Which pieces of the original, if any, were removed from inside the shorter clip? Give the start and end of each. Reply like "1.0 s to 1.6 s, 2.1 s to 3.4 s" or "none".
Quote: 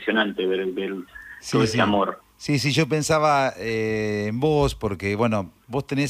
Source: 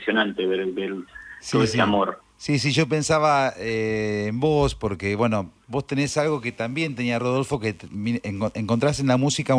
none

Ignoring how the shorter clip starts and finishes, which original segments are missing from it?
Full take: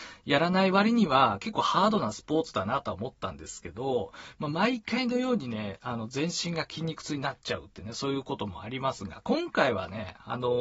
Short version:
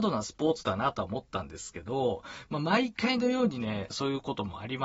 5.8 s to 7.9 s

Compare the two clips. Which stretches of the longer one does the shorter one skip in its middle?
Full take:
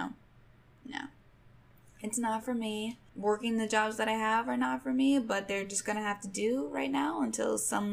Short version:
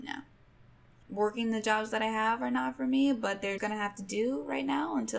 1.9 s to 3.1 s, 5.6 s to 5.8 s

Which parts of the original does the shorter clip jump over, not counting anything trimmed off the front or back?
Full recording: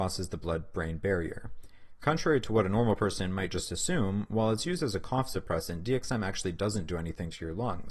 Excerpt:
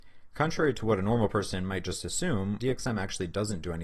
4.3 s to 5.8 s

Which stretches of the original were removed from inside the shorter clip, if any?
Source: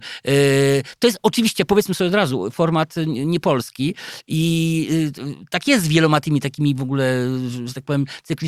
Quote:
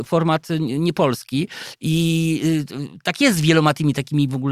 none

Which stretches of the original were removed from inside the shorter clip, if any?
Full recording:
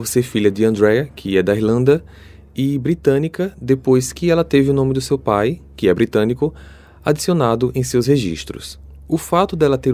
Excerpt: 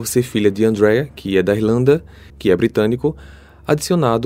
2.3 s to 5.7 s

